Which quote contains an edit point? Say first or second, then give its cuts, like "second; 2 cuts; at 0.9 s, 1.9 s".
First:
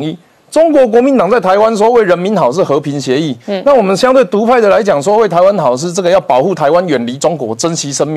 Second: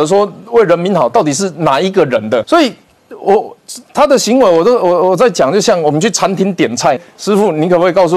second; 2 cuts; at 2.4 s, 7.0 s